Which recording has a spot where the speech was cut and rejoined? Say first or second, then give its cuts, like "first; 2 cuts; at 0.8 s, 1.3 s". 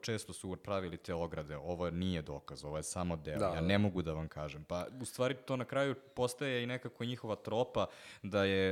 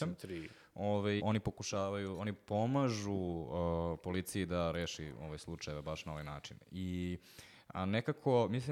second; 1 cut; at 1.2 s